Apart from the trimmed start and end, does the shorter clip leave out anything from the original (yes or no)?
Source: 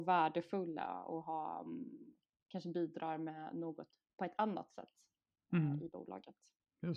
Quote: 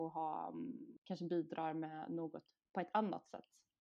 yes